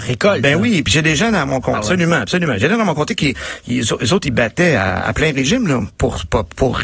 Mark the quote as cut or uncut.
cut